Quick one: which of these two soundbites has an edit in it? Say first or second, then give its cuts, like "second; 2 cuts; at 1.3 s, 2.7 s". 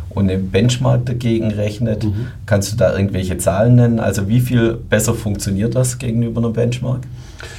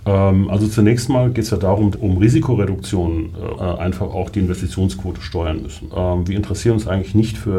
second; 3 cuts; at 1.9 s, 3.6 s, 5.9 s